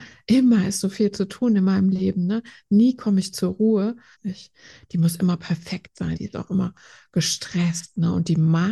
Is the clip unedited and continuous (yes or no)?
no